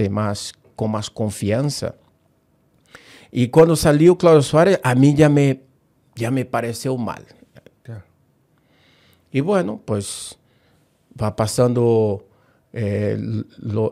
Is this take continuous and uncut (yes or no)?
no